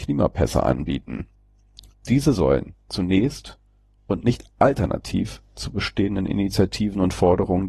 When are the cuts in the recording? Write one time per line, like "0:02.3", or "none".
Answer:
none